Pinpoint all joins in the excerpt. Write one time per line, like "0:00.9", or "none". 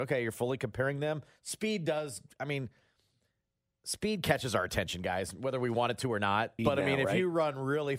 0:06.6